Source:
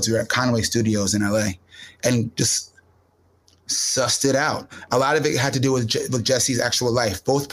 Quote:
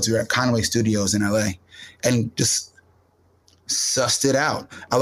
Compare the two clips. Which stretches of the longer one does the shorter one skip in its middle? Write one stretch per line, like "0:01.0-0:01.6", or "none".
none